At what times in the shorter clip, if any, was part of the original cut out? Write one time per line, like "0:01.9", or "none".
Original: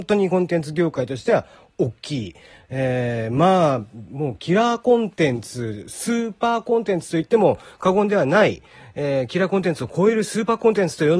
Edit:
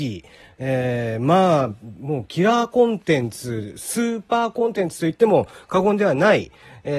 none